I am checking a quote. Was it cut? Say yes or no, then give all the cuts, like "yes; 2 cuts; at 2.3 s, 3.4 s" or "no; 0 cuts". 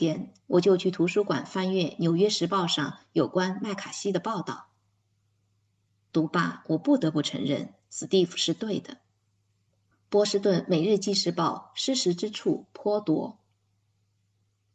no; 0 cuts